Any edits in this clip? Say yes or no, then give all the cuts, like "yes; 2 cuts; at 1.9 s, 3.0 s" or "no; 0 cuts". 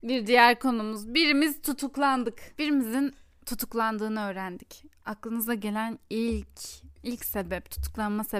no; 0 cuts